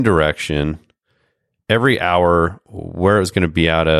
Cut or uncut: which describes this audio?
uncut